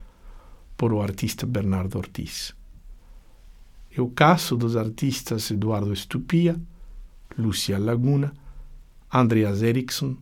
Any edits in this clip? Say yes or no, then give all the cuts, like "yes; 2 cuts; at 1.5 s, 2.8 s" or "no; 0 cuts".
yes; 1 cut; at 3.9 s